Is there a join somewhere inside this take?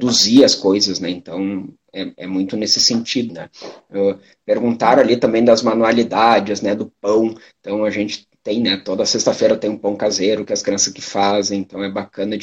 yes; 1 cut; at 3.3 s

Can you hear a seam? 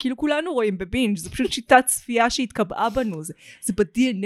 no; 0 cuts

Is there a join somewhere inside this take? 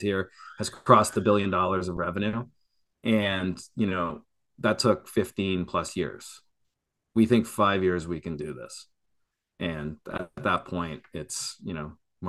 no; 0 cuts

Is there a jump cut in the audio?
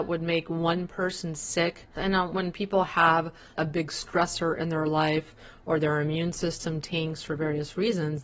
yes; 2 cuts; at 1.9 s, 3.5 s

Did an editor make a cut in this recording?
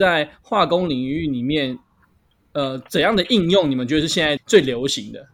yes; 1 cut; at 4.4 s

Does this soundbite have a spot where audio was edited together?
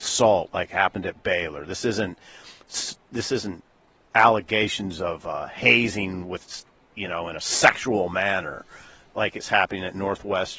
no; 0 cuts

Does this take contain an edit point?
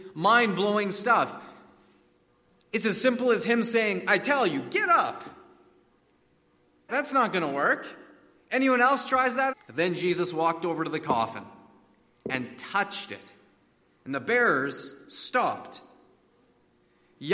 yes; 2 cuts; at 6.9 s, 9.5 s

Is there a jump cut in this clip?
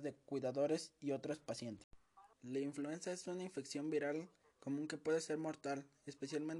yes; 1 cut; at 2.3 s

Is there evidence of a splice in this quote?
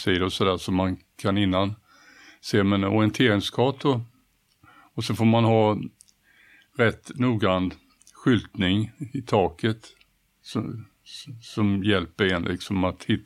no; 0 cuts

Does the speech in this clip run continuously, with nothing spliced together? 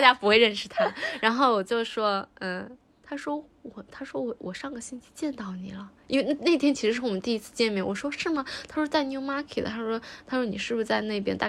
yes; 0 cuts

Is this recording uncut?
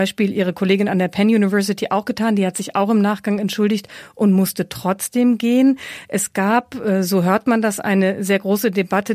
yes; 0 cuts

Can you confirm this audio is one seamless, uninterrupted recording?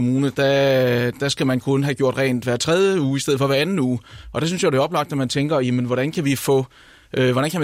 yes; 0 cuts

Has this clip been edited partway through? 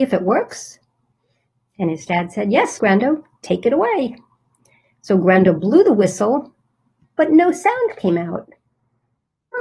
yes; 1 cut; at 2.8 s

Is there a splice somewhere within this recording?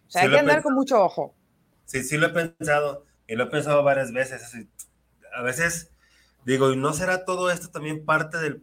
no; 0 cuts

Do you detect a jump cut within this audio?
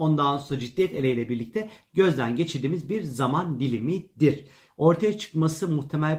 yes; 1 cut; at 4.7 s

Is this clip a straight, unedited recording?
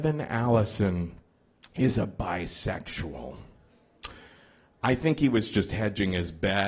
yes; 0 cuts

